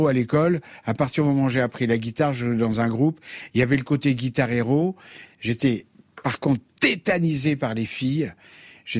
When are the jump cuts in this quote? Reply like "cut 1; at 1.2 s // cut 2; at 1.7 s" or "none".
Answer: cut 1; at 5.2 s